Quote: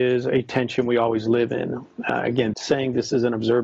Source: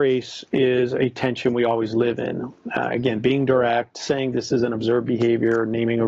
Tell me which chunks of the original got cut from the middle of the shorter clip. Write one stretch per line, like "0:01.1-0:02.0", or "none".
0:03.2-0:03.9